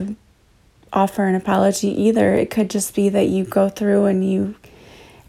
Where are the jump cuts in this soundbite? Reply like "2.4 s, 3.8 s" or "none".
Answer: none